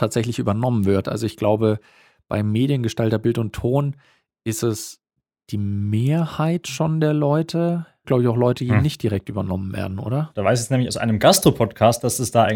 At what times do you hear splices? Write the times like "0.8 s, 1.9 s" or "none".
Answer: 1.0 s, 8.0 s, 10.3 s